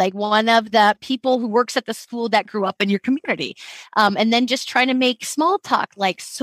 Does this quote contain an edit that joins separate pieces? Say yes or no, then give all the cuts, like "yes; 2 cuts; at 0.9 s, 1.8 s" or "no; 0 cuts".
no; 0 cuts